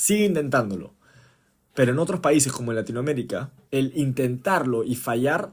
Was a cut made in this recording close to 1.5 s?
no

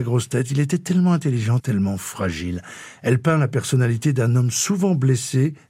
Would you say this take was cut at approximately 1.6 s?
yes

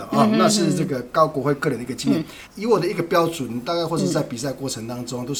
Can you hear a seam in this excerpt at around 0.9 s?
no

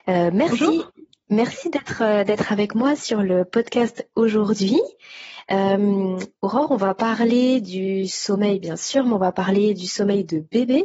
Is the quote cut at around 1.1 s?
no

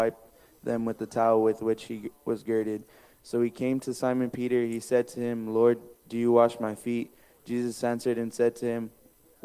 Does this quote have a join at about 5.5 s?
no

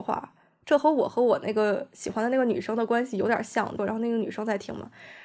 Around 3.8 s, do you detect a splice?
yes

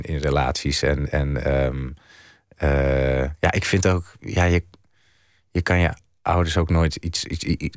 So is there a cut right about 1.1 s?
no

